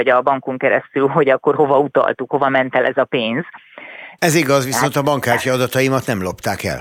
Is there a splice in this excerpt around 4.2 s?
yes; 1 cut; at 4.2 s

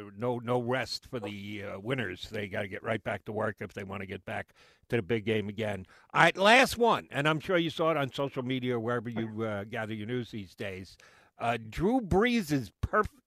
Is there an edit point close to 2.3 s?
no; 0 cuts

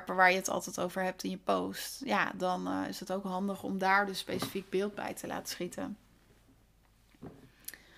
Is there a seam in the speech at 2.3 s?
no; 0 cuts

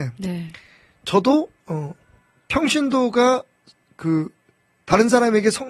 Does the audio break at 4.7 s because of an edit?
no; 1 cut; at 1.6 s

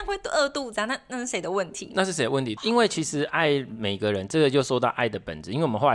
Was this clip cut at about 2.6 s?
yes; 1 cut; at 2.6 s

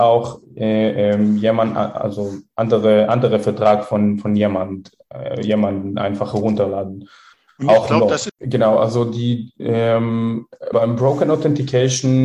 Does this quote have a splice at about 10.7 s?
yes; 2 cuts; at 8.3 s, 10.7 s

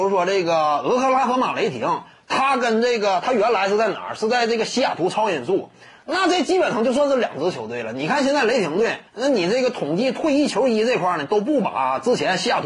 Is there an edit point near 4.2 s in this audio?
no; 1 cut; at 9.1 s

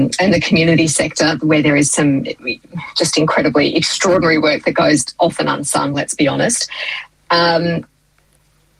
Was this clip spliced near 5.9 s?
no; 0 cuts

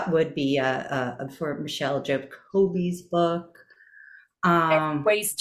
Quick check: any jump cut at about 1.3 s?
yes; 1 cut; at 1.3 s

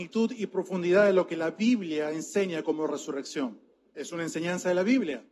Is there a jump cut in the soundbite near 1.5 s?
no; 1 cut; at 3.9 s

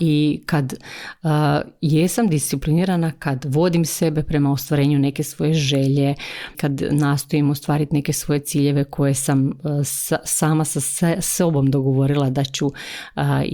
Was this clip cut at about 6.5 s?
yes; 1 cut; at 6.5 s

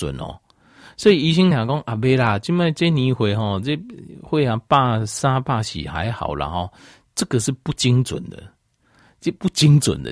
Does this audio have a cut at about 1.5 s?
no; 0 cuts

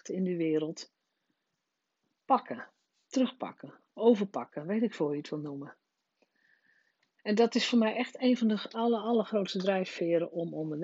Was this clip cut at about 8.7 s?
yes; 1 cut; at 8.7 s

